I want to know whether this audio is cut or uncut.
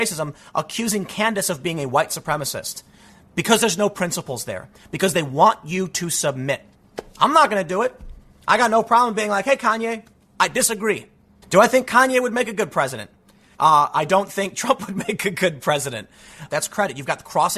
cut